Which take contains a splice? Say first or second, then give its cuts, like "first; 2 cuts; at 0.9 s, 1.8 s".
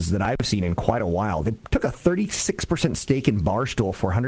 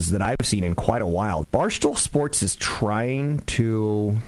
second; 1 cut; at 1.4 s